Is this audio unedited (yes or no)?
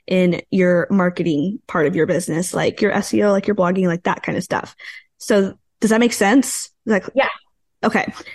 yes